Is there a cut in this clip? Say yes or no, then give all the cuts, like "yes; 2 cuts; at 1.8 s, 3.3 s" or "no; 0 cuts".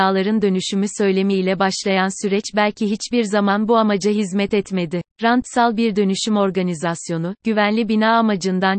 yes; 1 cut; at 5.1 s